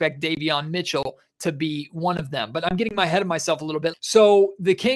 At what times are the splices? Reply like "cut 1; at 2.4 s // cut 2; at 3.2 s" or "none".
cut 1; at 3.9 s